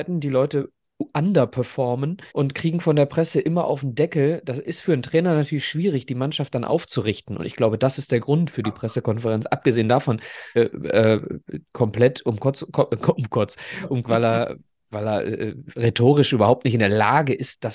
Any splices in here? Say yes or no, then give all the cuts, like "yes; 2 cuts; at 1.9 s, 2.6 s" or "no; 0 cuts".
yes; 3 cuts; at 2.3 s, 10.5 s, 14.0 s